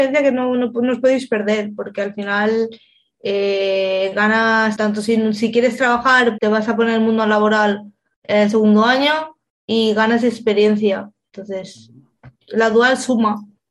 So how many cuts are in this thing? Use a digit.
2